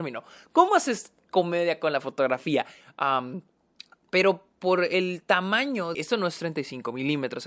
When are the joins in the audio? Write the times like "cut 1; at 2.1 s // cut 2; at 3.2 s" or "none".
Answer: cut 1; at 2.8 s // cut 2; at 5.9 s